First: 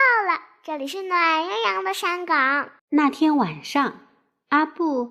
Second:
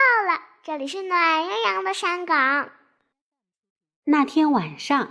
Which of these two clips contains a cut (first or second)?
first